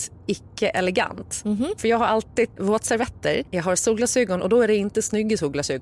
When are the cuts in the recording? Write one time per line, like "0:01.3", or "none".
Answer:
0:02.6